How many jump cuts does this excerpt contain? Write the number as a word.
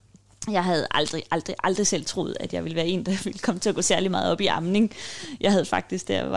zero